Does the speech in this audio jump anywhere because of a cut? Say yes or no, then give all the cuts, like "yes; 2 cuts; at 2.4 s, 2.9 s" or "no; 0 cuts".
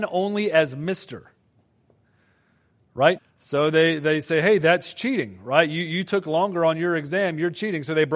yes; 1 cut; at 3.2 s